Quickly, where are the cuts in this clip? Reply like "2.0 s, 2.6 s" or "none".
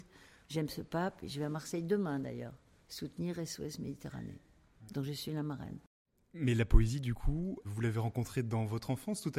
7.6 s